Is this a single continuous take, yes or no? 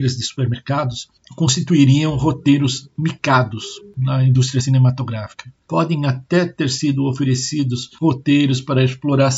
yes